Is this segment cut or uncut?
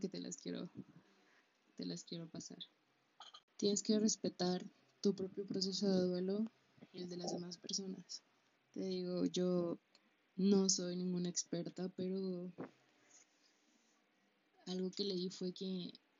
cut